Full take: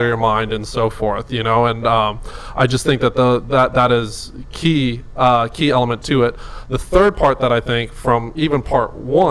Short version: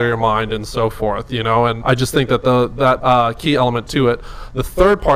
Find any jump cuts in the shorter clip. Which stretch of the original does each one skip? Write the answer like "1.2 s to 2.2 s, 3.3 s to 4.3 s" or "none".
1.8 s to 2.5 s, 3.7 s to 5.1 s

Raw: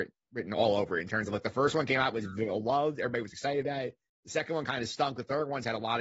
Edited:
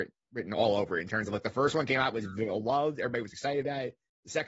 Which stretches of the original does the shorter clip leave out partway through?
none

